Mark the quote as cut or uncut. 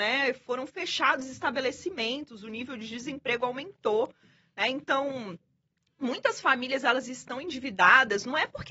uncut